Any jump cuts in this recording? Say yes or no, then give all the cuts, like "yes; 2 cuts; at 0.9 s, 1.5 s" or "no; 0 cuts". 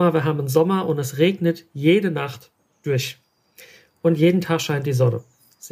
no; 0 cuts